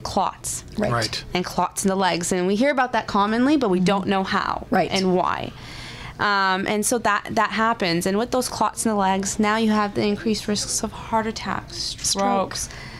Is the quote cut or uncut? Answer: uncut